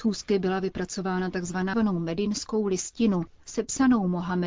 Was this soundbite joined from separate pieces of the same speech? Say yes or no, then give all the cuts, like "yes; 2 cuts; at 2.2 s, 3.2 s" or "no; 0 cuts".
yes; 1 cut; at 1.7 s